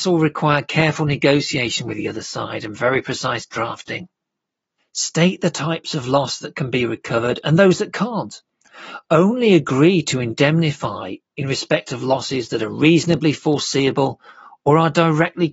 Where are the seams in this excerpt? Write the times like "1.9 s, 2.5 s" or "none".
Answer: 4.8 s